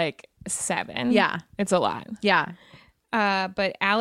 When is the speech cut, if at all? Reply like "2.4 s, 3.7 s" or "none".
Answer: none